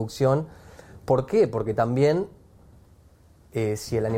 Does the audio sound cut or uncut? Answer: uncut